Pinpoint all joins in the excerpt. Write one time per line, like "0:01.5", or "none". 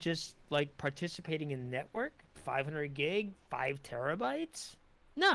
0:02.3